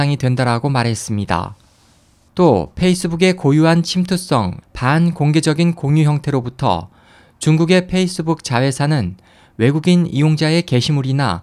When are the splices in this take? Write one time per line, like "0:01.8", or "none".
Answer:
0:04.6